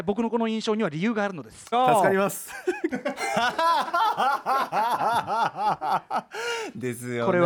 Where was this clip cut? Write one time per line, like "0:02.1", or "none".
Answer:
0:01.7
0:02.9